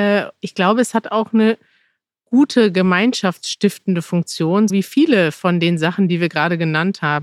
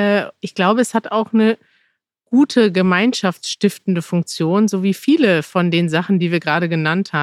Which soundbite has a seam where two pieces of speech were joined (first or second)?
first